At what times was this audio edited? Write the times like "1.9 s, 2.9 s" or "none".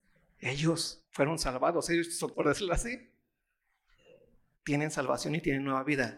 2.3 s